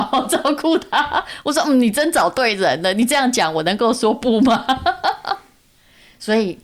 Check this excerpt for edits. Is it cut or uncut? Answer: uncut